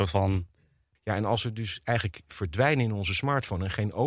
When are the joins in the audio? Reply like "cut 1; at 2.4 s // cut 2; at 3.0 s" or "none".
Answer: cut 1; at 1.0 s